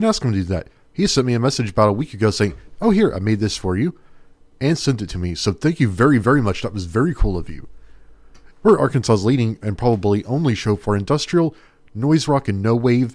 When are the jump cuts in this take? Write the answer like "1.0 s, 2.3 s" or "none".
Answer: 8.5 s